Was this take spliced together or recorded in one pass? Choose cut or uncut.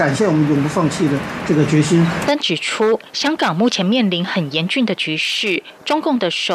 cut